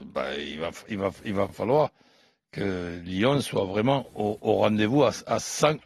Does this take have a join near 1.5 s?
no; 0 cuts

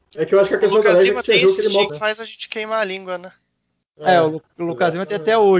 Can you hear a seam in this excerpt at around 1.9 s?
yes; 1 cut; at 1.9 s

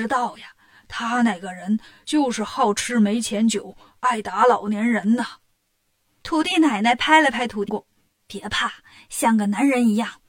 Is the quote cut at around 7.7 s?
yes; 1 cut; at 7.7 s

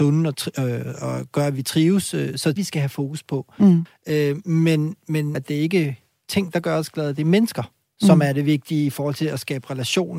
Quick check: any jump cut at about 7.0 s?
no; 3 cuts; at 2.6 s, 3.9 s, 5.3 s

